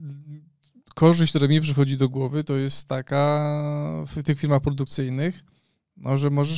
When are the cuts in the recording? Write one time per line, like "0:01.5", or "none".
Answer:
none